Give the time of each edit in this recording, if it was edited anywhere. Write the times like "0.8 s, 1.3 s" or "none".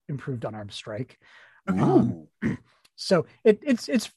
none